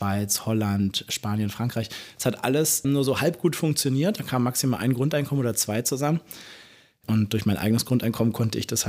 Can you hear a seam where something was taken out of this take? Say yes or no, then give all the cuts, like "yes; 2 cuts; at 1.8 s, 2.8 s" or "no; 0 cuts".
yes; 2 cuts; at 2.8 s, 7.0 s